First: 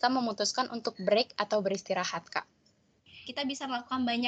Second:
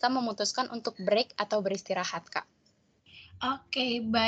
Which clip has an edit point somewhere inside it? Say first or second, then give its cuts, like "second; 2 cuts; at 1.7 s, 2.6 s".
first; 1 cut; at 3.2 s